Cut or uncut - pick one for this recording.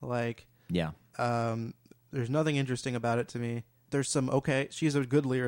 cut